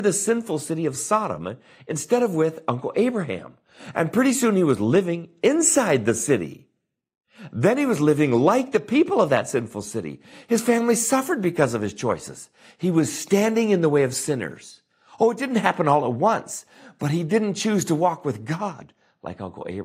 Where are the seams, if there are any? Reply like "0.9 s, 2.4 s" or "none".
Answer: none